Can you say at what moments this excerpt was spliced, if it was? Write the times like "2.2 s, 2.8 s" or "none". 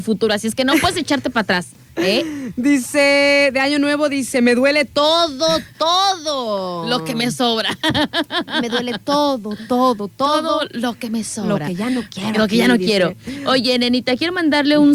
none

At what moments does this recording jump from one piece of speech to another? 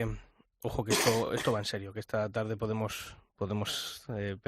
none

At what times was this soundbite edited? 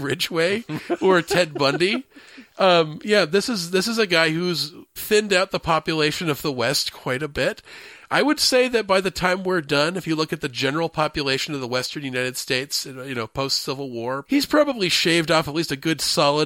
5.0 s, 14.3 s

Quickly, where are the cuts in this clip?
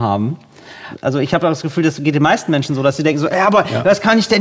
none

